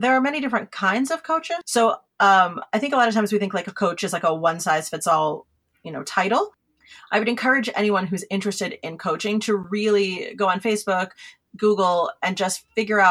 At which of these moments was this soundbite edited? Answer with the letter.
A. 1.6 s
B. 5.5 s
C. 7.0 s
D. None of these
A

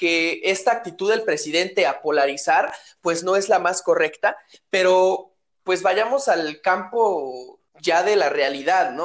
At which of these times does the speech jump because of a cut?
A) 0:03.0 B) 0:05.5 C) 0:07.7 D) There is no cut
C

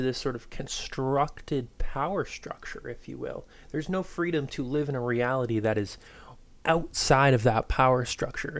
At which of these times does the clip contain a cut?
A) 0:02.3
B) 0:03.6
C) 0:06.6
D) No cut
C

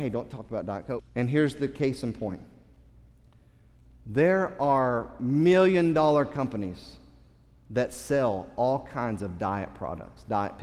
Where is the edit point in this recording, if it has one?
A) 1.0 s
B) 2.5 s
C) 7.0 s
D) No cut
A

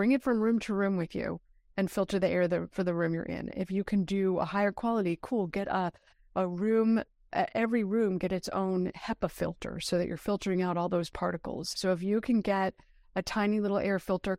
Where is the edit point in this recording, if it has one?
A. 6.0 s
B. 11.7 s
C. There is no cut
B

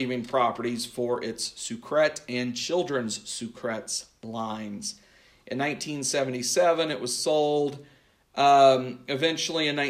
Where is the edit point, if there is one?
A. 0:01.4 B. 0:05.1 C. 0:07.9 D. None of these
D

